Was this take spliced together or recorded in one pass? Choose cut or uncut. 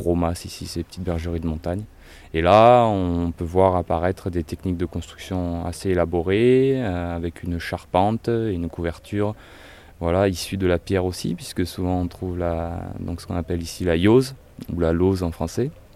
uncut